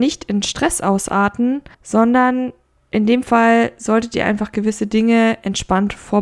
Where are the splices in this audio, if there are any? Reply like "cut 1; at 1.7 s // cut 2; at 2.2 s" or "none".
cut 1; at 1.7 s